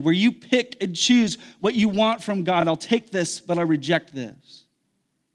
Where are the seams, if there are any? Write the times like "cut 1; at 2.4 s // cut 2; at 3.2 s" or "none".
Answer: none